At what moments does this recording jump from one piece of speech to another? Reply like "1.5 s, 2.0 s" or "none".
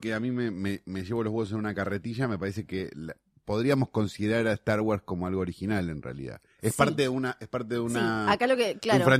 none